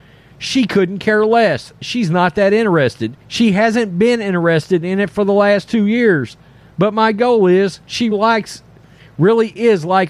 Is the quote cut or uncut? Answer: cut